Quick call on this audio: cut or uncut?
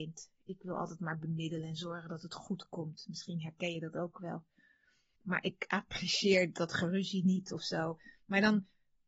cut